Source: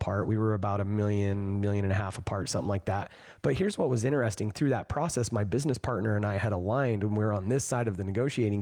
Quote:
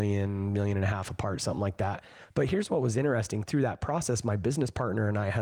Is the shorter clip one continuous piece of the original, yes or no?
yes